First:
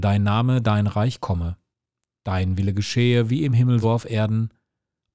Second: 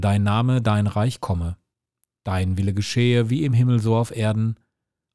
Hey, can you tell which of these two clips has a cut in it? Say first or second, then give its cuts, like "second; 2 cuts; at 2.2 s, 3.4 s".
first; 1 cut; at 3.8 s